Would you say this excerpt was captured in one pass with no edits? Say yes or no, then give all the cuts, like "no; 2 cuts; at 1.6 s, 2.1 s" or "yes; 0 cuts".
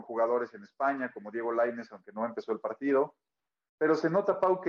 yes; 0 cuts